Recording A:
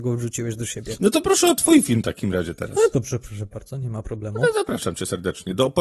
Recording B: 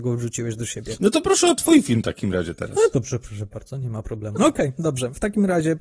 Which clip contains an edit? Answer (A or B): B